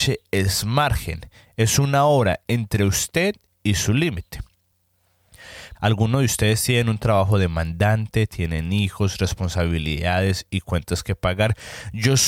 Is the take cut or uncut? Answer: cut